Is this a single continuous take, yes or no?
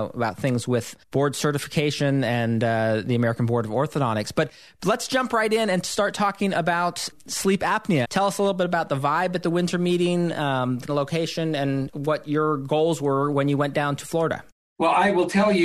no